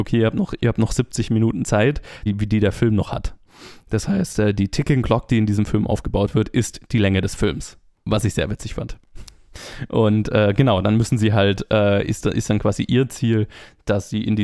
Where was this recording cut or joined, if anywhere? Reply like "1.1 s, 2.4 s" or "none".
2.3 s